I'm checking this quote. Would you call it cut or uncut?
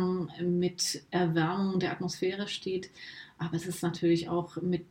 uncut